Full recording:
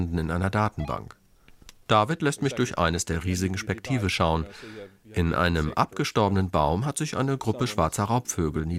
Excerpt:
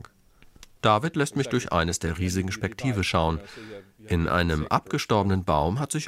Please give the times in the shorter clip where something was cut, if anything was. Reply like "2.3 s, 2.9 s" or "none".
none